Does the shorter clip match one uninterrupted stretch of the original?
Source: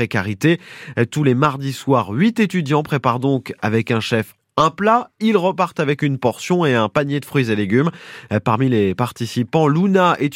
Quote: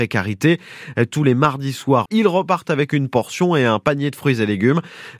no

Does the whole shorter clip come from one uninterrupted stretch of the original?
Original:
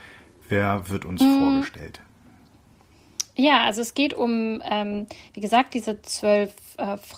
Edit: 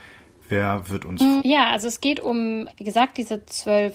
no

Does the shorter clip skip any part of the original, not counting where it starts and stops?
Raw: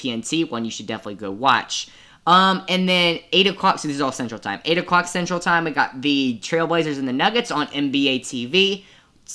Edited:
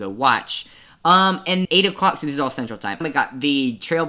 yes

